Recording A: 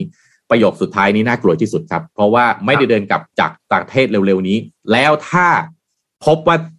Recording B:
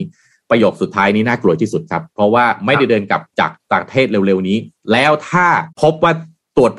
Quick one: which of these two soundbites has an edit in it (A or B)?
B